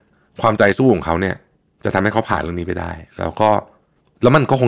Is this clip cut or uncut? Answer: uncut